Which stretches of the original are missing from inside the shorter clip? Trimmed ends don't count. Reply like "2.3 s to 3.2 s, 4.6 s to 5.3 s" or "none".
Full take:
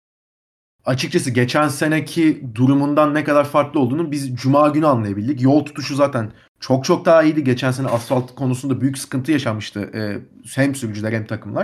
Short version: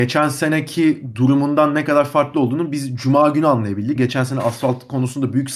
5.3 s to 7.4 s